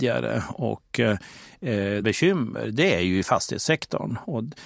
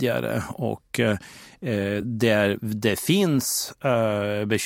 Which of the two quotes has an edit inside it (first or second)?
first